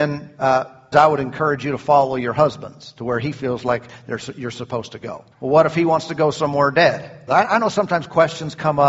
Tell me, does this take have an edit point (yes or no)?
yes